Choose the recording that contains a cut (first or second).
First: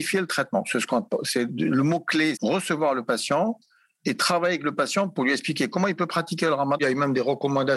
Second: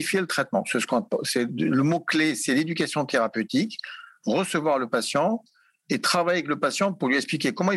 first